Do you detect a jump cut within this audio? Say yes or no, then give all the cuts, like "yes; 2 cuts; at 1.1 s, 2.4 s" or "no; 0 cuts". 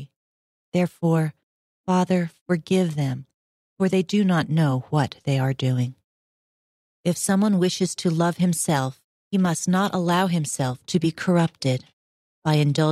no; 0 cuts